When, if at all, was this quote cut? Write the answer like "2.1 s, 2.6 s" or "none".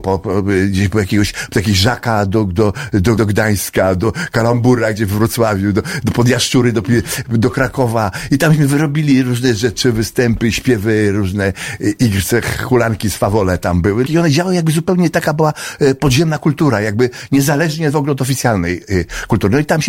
3.2 s, 14.1 s